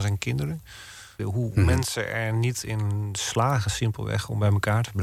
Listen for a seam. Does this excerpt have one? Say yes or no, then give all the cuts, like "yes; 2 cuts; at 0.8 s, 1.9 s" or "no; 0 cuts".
yes; 1 cut; at 1.2 s